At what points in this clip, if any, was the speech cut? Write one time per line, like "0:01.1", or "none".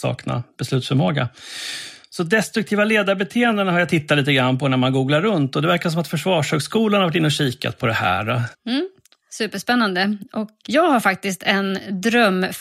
0:08.5
0:10.6